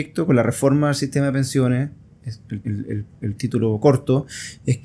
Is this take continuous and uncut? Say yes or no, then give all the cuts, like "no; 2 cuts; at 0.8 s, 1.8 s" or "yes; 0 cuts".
no; 1 cut; at 2.6 s